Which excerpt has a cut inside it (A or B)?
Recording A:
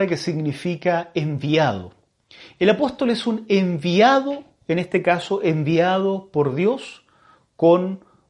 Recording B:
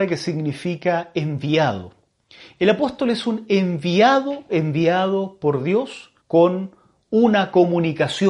B